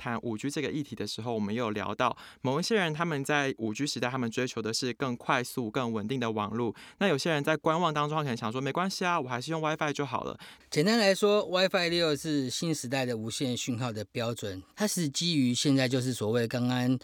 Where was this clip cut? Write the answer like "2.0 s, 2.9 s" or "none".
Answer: 10.6 s, 14.7 s

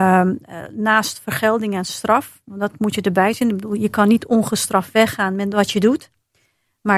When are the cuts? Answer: none

